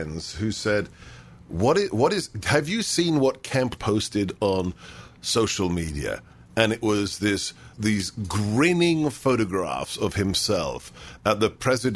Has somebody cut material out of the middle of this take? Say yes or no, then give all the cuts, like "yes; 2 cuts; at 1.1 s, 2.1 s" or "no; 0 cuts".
yes; 2 cuts; at 3.8 s, 7.7 s